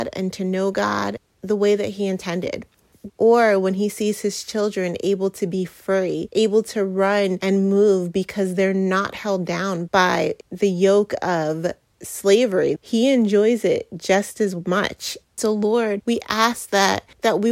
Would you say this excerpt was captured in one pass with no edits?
no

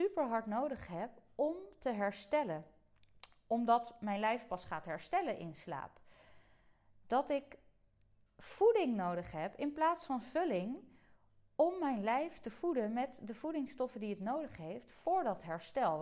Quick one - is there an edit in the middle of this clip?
no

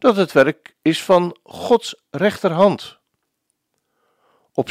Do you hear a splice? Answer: no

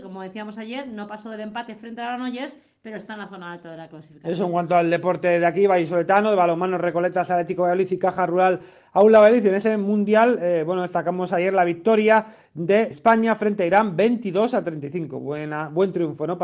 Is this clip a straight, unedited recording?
no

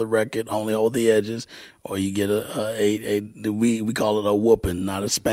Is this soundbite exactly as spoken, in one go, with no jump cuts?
yes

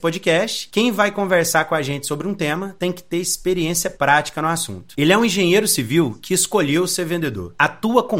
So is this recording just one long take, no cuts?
no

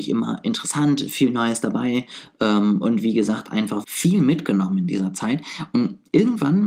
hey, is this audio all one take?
no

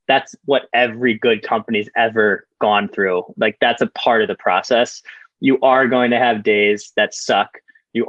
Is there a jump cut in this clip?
no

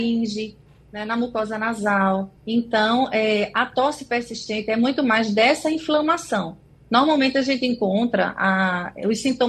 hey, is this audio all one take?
no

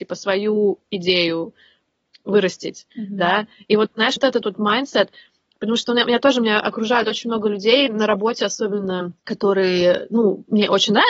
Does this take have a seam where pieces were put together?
yes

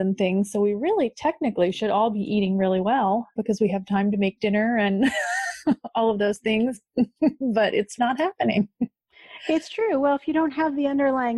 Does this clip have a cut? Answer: yes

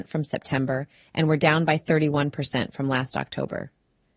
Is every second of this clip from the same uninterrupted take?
yes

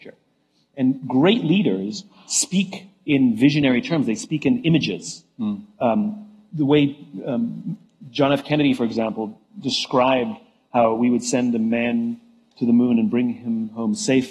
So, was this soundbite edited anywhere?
no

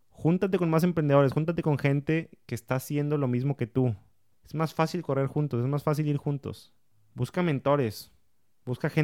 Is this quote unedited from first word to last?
yes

